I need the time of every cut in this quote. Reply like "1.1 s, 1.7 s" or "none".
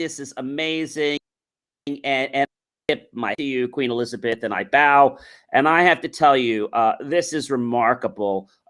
none